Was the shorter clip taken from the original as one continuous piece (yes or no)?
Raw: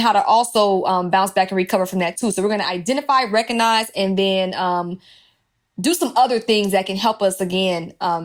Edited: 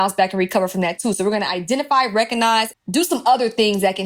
no